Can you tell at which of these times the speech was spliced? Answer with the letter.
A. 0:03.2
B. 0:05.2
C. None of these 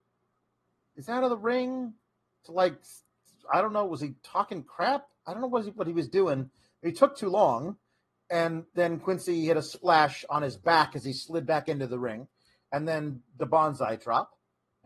C